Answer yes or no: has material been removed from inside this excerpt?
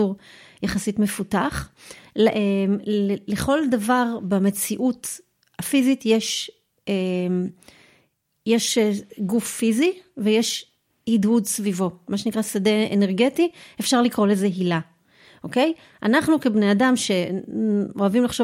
no